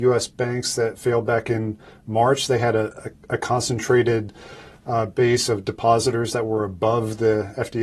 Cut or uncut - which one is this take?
uncut